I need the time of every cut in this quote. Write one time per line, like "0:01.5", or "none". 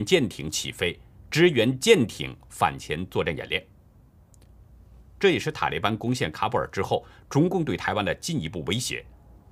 none